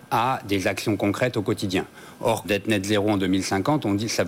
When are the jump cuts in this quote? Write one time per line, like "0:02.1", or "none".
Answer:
0:02.4

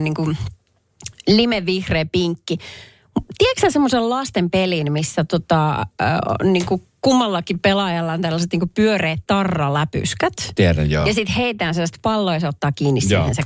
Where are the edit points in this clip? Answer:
none

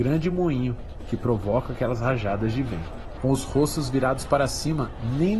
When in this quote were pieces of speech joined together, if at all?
0:03.2

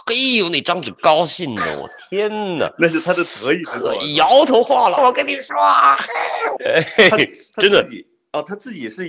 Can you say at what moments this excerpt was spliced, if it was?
0:05.0
0:06.6

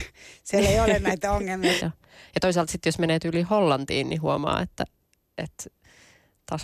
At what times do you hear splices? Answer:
0:01.8

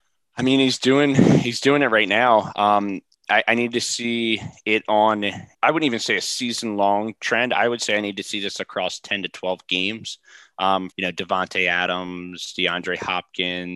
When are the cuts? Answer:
0:05.5
0:10.9

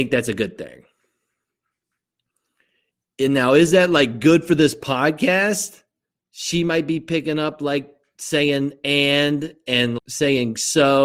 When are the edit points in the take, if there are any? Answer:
0:06.2
0:10.0

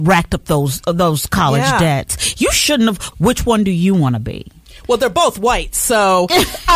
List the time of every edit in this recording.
0:03.1

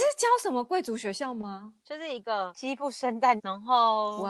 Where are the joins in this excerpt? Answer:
0:01.8
0:03.4

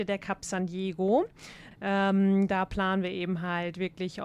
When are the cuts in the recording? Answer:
0:01.7

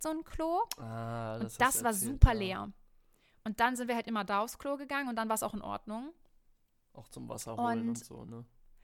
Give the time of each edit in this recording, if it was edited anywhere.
none

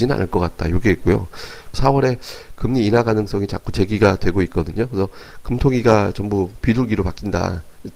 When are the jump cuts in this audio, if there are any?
0:01.7

